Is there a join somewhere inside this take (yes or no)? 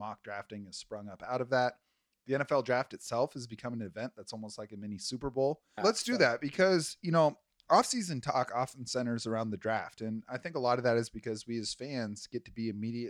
yes